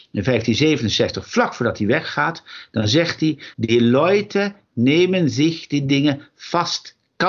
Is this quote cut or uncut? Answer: cut